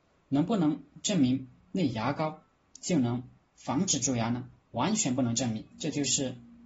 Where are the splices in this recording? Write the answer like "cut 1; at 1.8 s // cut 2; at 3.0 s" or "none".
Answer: cut 1; at 5.7 s